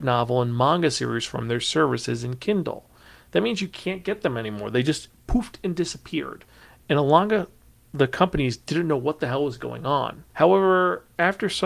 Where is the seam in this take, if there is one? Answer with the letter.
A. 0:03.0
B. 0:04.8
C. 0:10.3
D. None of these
C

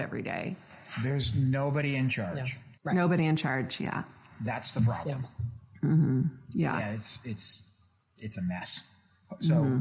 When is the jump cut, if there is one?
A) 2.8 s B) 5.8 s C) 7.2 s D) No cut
A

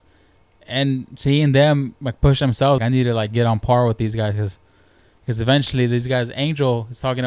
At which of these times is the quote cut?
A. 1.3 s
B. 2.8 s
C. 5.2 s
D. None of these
B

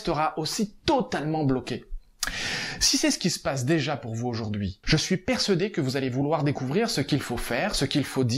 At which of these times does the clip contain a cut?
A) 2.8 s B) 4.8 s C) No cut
B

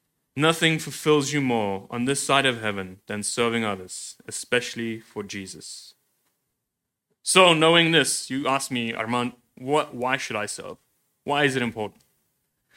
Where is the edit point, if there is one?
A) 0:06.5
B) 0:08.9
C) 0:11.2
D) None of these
D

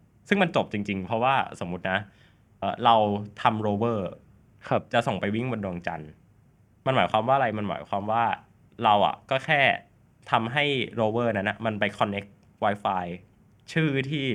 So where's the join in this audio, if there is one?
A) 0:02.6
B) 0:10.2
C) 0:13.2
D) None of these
A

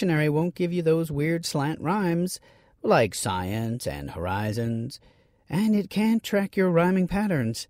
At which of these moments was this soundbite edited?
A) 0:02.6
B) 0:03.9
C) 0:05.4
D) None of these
D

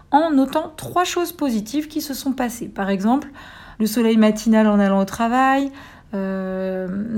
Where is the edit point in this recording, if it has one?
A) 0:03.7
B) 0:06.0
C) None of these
A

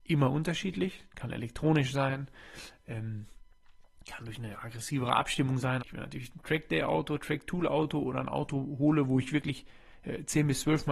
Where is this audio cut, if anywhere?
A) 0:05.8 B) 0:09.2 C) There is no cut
A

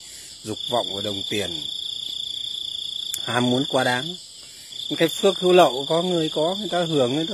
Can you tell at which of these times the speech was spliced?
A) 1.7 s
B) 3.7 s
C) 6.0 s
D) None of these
D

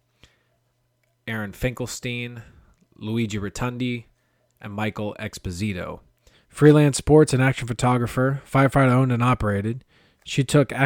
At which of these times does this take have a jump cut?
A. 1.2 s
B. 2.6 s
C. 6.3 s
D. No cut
C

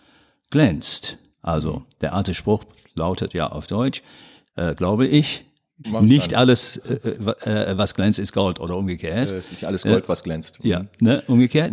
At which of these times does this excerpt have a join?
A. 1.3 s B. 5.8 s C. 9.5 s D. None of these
B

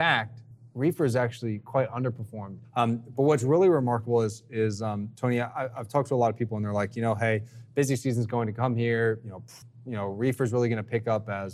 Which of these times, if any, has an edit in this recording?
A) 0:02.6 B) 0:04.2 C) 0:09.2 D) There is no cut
A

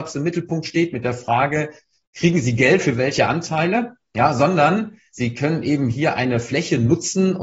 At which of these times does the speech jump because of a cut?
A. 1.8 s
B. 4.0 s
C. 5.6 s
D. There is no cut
D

